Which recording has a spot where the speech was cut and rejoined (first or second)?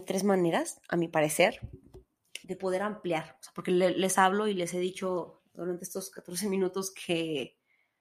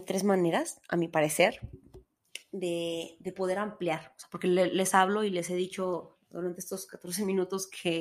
first